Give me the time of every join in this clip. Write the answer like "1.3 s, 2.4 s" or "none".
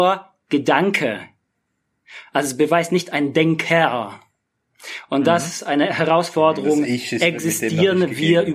none